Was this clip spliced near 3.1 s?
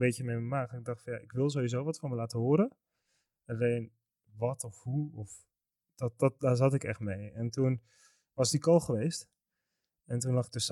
no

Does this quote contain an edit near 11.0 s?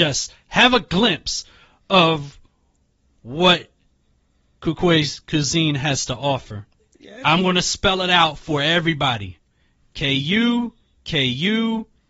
no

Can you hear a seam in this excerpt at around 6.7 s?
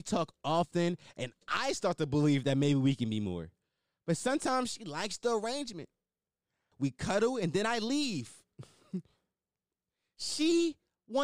yes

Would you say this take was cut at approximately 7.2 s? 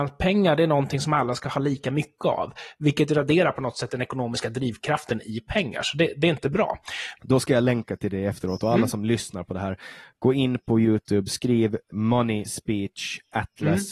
yes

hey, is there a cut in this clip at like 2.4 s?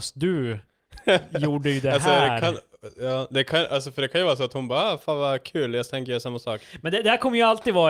no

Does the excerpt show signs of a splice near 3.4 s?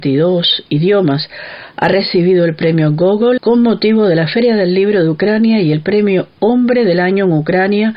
yes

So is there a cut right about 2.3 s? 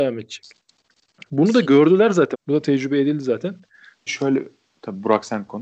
yes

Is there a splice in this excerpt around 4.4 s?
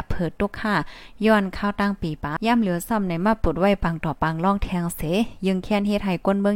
no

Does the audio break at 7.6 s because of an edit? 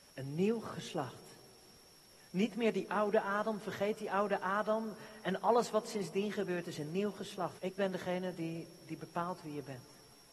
yes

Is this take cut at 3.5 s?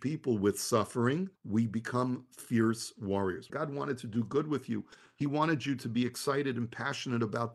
yes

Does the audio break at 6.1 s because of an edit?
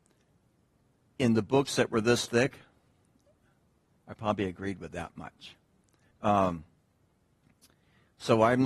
yes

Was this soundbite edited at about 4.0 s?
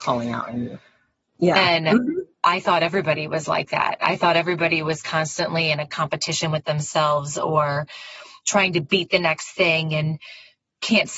no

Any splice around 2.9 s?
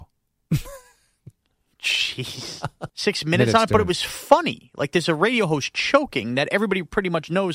yes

